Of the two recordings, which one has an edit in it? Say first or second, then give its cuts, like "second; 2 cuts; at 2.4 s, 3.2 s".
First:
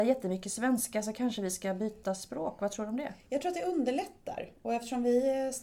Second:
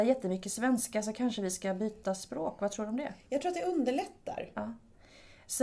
second; 1 cut; at 4.5 s